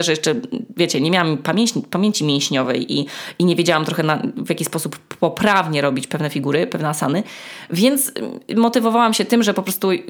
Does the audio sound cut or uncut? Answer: uncut